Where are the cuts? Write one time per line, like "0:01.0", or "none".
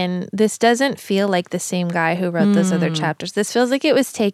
none